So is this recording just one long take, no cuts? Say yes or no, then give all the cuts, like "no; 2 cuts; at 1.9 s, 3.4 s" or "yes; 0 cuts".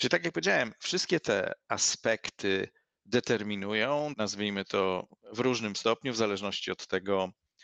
no; 1 cut; at 4.1 s